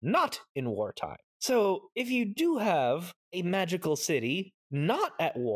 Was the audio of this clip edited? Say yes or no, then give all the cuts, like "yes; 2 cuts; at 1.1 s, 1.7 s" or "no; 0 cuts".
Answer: no; 0 cuts